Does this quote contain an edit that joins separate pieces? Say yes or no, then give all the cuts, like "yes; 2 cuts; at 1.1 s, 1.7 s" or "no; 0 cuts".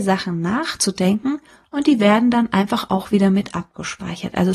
no; 0 cuts